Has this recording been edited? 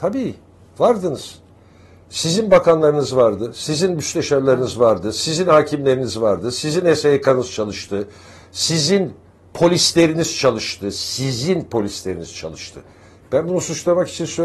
no; 0 cuts

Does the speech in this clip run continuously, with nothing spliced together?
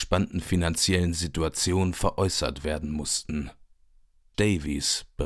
no; 1 cut; at 4.3 s

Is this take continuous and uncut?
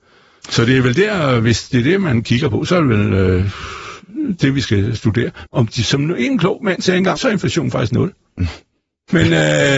no; 2 cuts; at 5.5 s, 7.2 s

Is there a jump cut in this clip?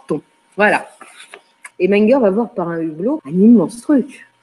yes; 2 cuts; at 1.7 s, 3.2 s

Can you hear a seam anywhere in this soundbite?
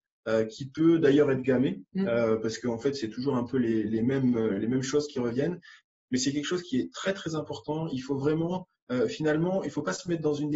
no; 0 cuts

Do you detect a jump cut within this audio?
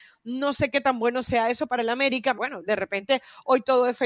yes; 1 cut; at 2.3 s

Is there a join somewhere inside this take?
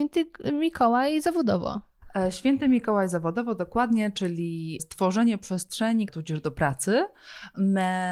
yes; 2 cuts; at 4.8 s, 6.1 s

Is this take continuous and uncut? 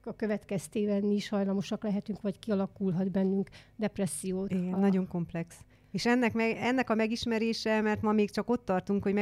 no; 1 cut; at 4.5 s

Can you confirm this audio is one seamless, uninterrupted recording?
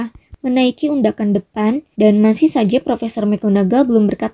no; 1 cut; at 1.9 s

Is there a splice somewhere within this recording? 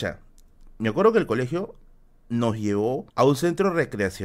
yes; 1 cut; at 3.1 s

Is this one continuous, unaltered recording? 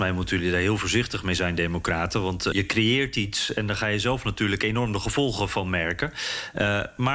no; 1 cut; at 2.5 s

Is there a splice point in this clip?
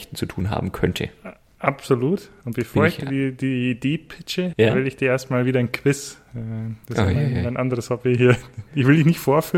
yes; 1 cut; at 4.5 s

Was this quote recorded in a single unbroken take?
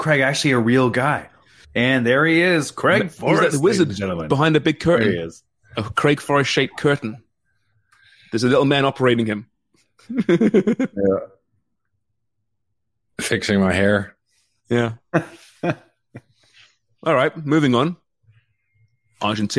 no; 1 cut; at 1.6 s

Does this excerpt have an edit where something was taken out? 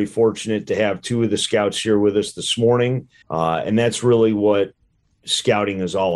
yes; 1 cut; at 3.2 s

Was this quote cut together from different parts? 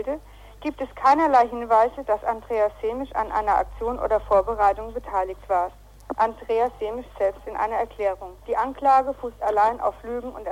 yes; 1 cut; at 8.4 s

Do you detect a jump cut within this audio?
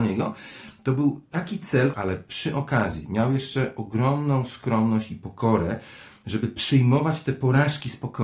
yes; 1 cut; at 1.9 s

